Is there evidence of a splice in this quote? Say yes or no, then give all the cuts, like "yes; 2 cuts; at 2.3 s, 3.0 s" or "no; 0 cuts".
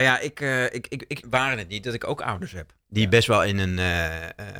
yes; 2 cuts; at 1.2 s, 2.8 s